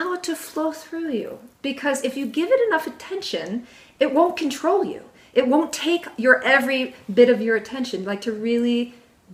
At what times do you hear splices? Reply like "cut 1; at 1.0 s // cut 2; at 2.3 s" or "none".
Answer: none